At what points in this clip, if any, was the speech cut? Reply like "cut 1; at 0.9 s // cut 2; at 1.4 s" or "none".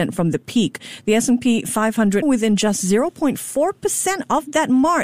cut 1; at 2.2 s